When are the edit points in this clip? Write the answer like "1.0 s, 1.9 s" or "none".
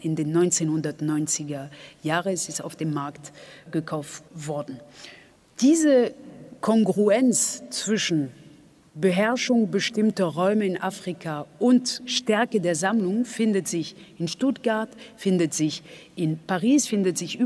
none